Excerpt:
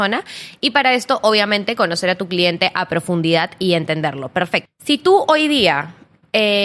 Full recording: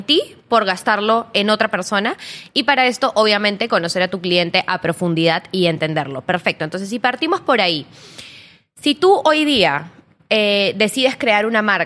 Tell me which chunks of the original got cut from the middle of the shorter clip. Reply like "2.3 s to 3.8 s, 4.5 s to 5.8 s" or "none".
6.6 s to 8.6 s